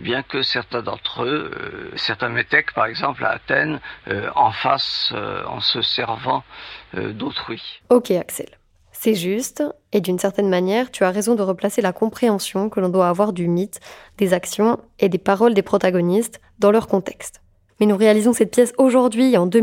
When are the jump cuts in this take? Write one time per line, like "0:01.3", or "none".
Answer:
0:07.8